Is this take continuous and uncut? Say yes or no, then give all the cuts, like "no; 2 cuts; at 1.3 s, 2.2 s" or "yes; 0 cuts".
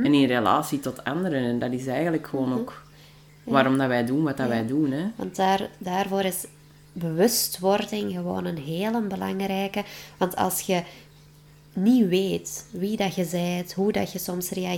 yes; 0 cuts